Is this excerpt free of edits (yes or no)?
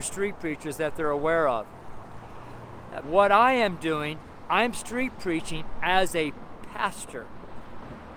no